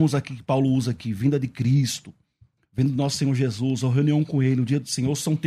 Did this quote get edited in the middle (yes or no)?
no